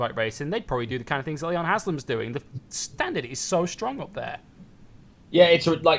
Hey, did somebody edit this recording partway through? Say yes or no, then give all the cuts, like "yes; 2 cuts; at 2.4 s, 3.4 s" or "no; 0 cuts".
no; 0 cuts